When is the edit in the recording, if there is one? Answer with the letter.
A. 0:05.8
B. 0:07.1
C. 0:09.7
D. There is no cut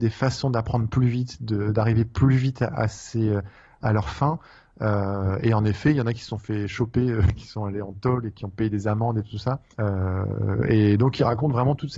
C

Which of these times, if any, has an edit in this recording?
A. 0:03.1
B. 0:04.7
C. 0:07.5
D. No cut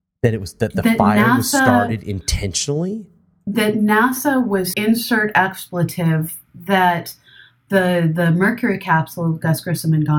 B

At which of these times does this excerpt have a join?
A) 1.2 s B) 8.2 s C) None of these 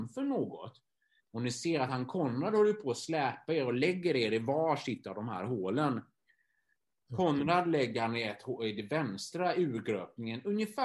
A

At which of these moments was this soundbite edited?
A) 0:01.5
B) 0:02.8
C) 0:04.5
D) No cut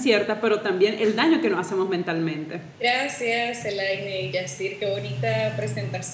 B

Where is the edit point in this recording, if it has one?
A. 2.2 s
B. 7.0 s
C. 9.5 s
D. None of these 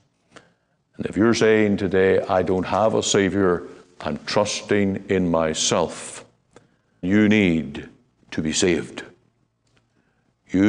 B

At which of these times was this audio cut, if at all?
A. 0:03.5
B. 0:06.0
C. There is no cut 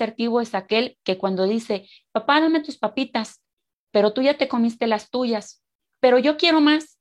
C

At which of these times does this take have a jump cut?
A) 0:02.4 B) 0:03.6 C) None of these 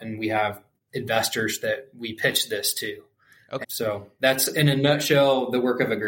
B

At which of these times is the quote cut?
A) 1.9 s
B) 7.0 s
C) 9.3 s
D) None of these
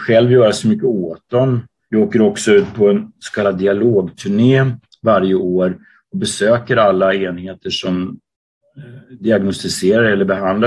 A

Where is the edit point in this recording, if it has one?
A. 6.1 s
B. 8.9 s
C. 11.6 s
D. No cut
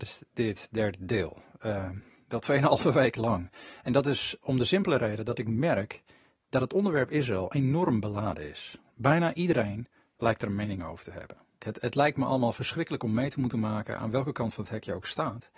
C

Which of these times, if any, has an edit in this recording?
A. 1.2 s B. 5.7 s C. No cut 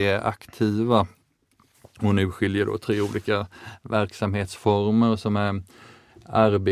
C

